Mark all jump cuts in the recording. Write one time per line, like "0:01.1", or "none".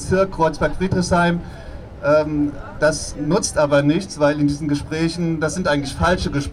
0:03.1